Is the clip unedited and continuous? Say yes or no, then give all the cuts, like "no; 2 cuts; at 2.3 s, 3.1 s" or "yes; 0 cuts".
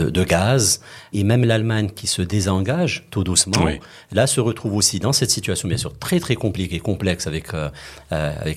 no; 1 cut; at 1.1 s